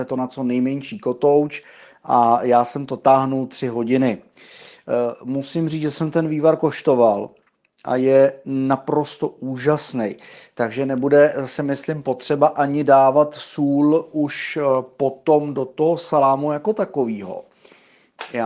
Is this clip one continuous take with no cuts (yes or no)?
yes